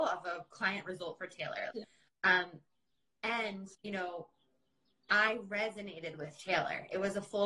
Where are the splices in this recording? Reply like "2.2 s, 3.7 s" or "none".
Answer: 1.7 s, 3.7 s